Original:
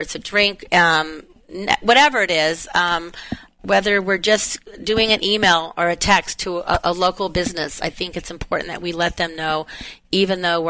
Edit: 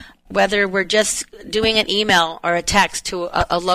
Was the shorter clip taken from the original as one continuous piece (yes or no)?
yes